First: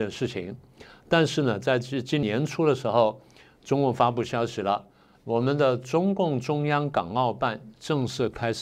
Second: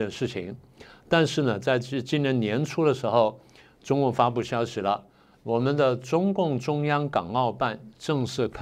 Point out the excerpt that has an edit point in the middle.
first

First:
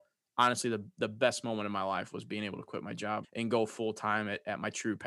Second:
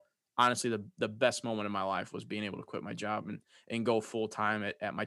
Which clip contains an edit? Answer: first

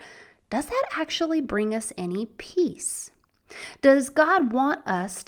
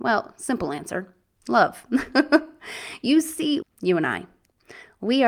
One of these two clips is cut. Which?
second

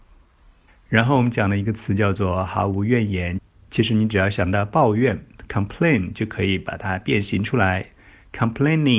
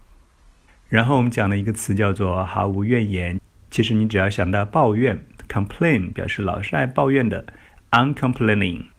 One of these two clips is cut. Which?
second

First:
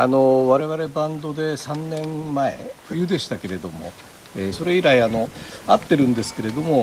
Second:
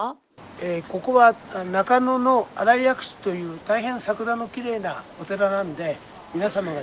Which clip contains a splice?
first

